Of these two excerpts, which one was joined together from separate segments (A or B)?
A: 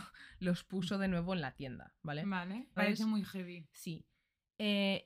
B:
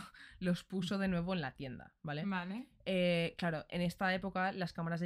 A